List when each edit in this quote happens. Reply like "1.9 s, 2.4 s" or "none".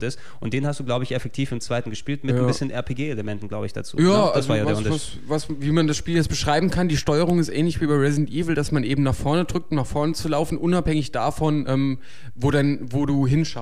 none

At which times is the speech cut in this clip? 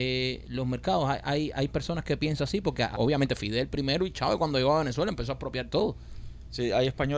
2.9 s

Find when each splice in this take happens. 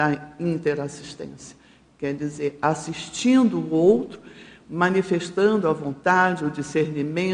none

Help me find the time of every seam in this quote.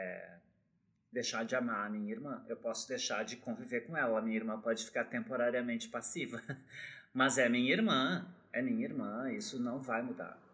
none

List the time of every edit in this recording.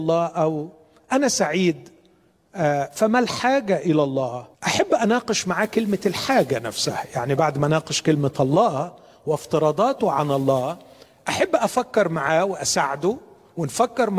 4.5 s

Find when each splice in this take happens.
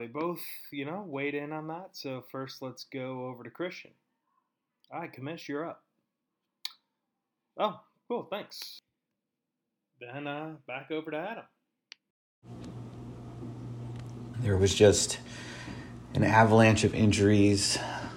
14.3 s

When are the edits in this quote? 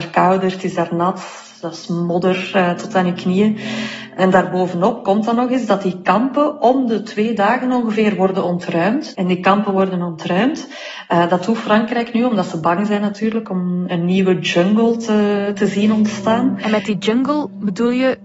9.1 s

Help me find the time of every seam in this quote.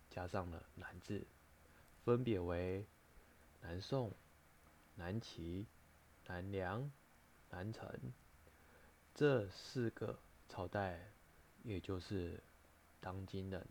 11.6 s

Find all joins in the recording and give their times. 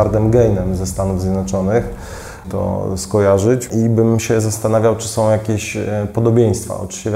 2.4 s

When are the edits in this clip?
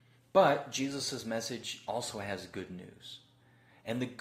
none

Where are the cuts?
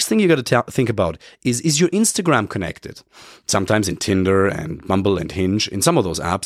none

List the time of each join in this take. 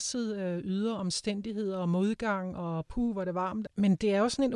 3.7 s

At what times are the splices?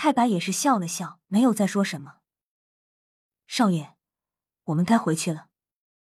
1.2 s

